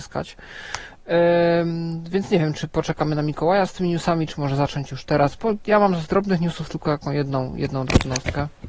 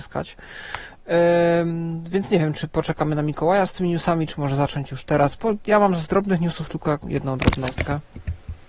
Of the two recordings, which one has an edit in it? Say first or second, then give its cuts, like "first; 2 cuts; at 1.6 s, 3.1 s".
second; 1 cut; at 7.0 s